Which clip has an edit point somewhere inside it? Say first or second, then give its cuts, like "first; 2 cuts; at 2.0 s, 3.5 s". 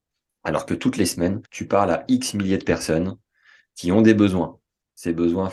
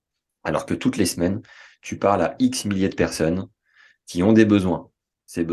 first; 1 cut; at 1.5 s